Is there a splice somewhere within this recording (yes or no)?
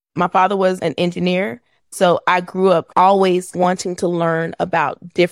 yes